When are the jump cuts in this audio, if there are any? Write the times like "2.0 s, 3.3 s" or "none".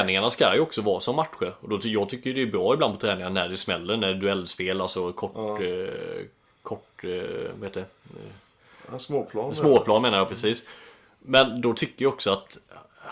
none